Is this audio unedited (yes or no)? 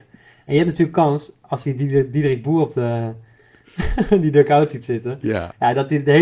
yes